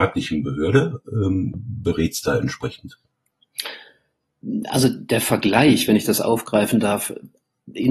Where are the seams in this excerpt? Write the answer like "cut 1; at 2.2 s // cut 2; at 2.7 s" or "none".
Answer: cut 1; at 1.5 s

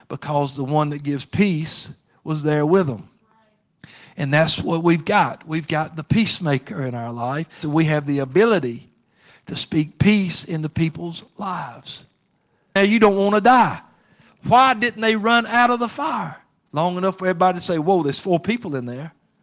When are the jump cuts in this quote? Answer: cut 1; at 7.6 s // cut 2; at 12.8 s // cut 3; at 16.7 s

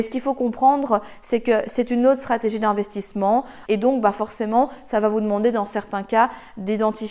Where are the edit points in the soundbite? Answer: cut 1; at 3.7 s

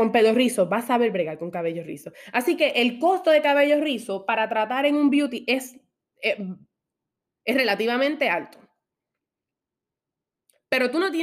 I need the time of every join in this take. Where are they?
cut 1; at 7.2 s

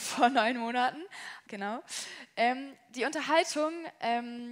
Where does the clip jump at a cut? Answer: cut 1; at 1.5 s

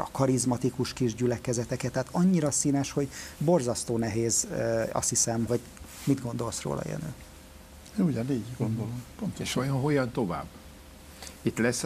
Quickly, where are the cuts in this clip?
cut 1; at 5.5 s

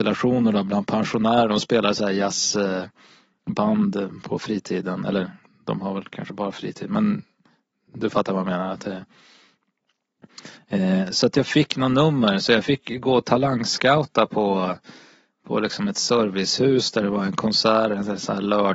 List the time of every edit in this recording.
none

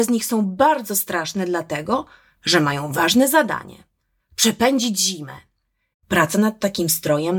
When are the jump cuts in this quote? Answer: cut 1; at 5.9 s

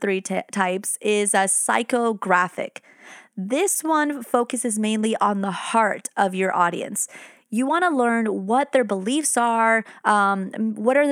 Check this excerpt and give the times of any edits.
none

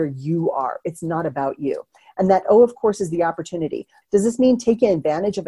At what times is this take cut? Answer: cut 1; at 4.0 s

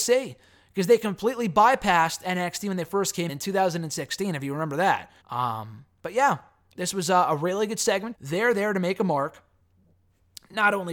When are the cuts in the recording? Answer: cut 1; at 3.3 s // cut 2; at 5.2 s // cut 3; at 8.1 s

